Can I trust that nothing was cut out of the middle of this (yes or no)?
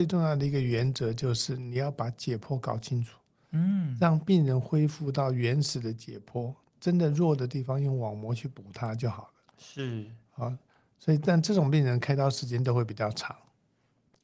yes